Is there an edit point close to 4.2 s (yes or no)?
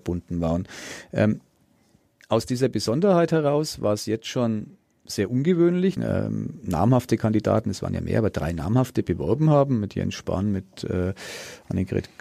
no